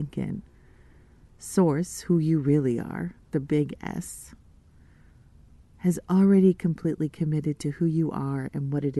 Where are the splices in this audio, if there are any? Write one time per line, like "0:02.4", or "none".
none